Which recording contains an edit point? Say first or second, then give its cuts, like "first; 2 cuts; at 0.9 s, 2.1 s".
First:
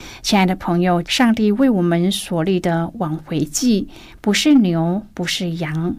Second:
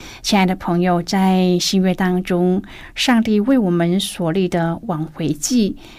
first; 1 cut; at 1.0 s